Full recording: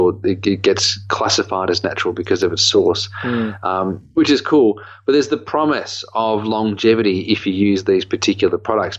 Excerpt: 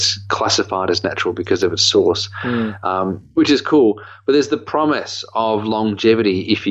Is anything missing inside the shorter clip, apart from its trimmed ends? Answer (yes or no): no